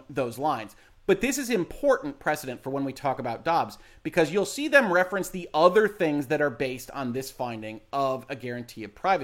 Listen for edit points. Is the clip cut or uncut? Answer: uncut